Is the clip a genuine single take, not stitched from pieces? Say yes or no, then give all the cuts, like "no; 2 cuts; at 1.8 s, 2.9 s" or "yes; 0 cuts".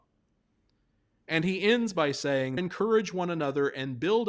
no; 1 cut; at 2.6 s